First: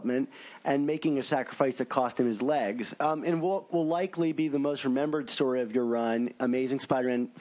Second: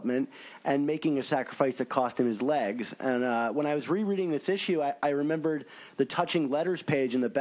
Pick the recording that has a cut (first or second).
first